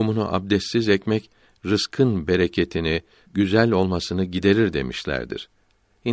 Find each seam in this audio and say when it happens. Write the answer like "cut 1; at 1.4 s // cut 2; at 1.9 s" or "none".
cut 1; at 3.3 s